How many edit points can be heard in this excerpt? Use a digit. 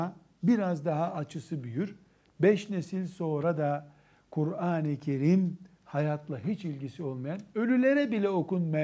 0